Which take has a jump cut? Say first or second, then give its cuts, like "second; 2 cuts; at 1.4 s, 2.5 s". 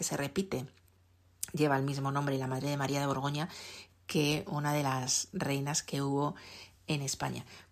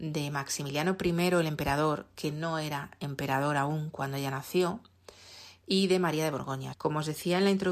second; 1 cut; at 6.7 s